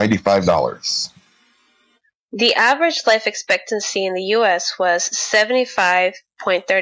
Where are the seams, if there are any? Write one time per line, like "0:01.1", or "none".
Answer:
none